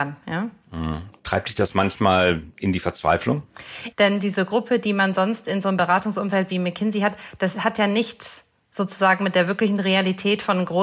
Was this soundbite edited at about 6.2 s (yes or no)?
no